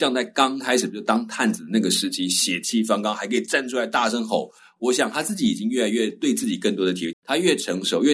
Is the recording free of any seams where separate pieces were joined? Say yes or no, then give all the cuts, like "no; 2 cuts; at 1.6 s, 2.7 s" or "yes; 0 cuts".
no; 1 cut; at 7.1 s